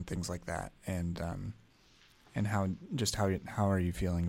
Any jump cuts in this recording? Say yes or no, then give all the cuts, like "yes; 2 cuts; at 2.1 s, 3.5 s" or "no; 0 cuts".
no; 0 cuts